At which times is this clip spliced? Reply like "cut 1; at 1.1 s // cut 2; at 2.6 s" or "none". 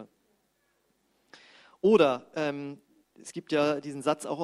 none